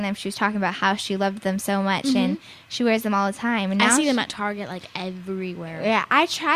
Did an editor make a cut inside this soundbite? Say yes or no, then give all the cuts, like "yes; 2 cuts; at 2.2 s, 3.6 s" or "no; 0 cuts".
no; 0 cuts